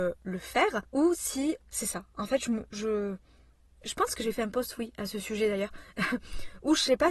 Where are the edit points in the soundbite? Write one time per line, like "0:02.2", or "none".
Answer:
none